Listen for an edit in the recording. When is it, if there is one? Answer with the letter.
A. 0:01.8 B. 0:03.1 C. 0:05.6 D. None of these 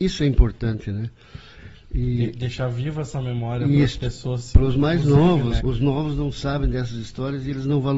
C